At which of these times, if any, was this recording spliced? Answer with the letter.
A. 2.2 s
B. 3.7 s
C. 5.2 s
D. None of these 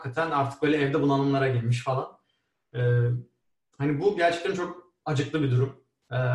D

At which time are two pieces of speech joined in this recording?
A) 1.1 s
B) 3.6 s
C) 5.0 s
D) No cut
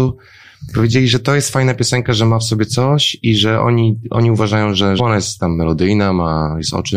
C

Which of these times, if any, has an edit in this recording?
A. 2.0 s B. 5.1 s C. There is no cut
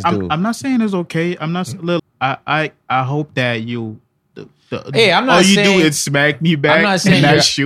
A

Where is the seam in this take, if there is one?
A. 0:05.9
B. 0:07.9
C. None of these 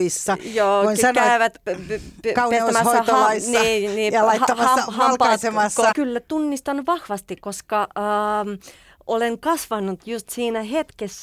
A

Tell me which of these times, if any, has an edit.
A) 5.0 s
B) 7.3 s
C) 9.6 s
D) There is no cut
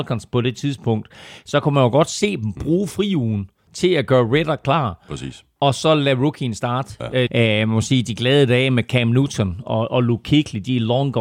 B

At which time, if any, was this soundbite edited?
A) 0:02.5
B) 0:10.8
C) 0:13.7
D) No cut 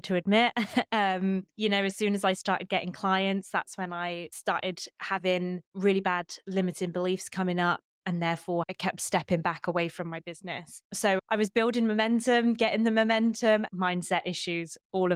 C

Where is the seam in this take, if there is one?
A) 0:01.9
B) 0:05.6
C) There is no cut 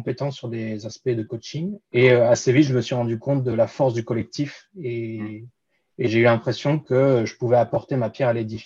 A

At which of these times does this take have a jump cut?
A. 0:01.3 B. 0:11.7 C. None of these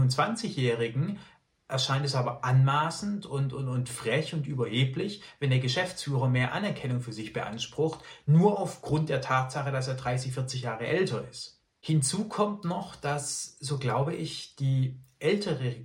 C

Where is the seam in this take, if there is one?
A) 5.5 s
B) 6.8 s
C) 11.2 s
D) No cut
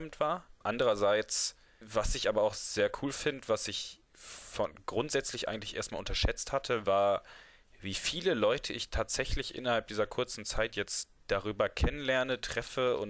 C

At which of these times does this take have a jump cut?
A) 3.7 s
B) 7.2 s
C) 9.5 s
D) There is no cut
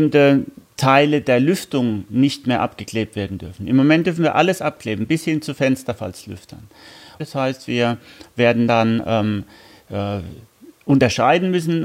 B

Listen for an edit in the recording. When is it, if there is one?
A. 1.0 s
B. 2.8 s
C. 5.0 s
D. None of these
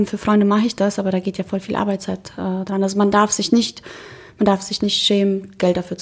D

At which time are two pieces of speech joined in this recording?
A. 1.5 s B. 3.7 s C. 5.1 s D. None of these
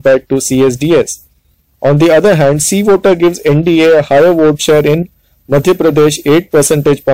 D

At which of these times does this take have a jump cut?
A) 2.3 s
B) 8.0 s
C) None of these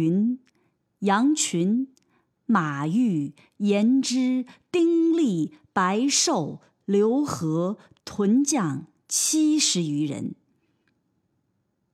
B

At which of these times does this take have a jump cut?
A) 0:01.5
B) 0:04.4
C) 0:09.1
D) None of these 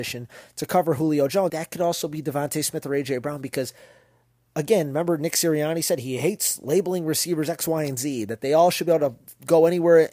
A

